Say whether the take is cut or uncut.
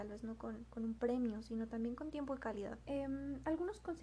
cut